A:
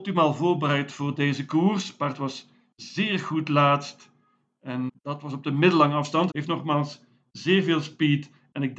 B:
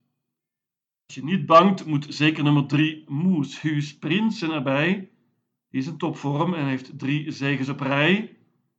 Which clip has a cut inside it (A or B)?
A